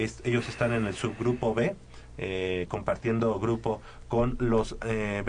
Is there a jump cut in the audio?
no; 0 cuts

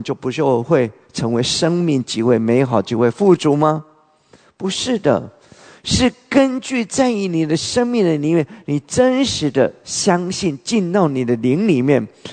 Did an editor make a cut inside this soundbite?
no; 0 cuts

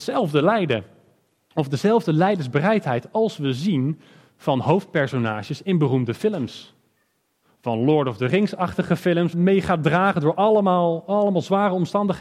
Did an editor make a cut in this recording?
yes; 1 cut; at 9.3 s

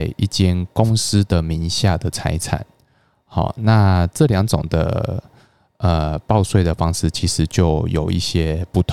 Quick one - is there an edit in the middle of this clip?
no; 0 cuts

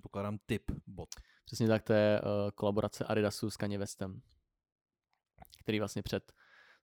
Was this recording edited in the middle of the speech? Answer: no; 0 cuts

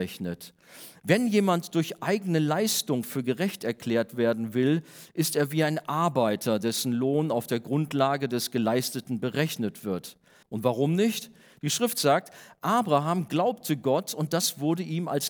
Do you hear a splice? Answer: yes; 1 cut; at 10.4 s

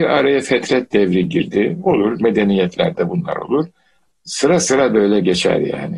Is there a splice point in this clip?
yes; 1 cut; at 4.1 s

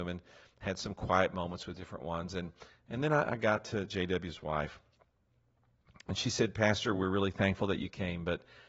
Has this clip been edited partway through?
no; 0 cuts

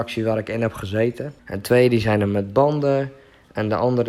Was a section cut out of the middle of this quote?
yes; 1 cut; at 1.4 s

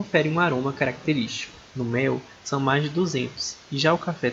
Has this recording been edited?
yes; 1 cut; at 1.7 s

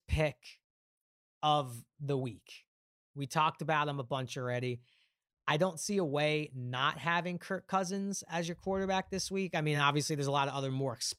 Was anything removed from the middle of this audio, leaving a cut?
no; 0 cuts

